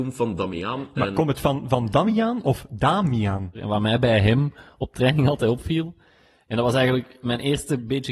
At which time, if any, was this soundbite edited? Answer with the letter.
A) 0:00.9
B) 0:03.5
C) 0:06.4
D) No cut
B